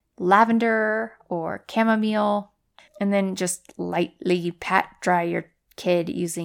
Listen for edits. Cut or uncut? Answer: cut